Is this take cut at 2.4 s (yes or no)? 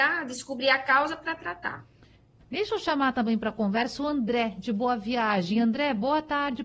yes